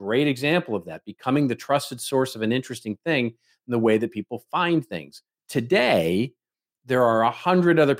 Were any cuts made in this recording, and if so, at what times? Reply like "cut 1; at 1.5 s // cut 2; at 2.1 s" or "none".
none